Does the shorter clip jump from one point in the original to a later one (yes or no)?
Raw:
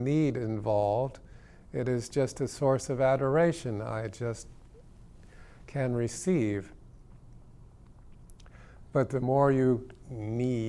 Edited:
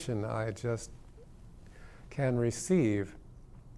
no